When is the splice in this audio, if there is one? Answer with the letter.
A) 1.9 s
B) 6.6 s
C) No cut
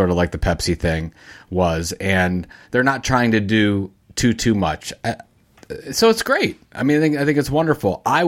C